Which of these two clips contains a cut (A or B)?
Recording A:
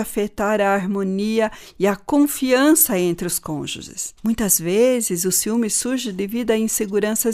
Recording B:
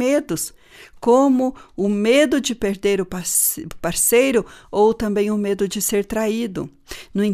A